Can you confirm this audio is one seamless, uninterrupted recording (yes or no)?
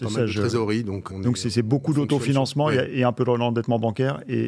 no